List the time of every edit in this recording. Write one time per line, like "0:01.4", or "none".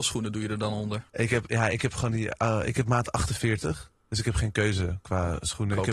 0:01.1